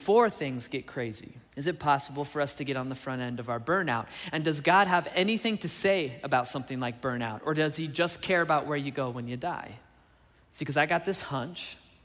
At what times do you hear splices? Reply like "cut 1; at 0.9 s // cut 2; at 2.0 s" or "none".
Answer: cut 1; at 1.5 s // cut 2; at 10.3 s